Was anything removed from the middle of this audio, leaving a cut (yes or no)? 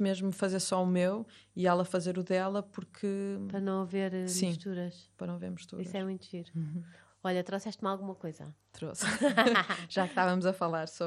no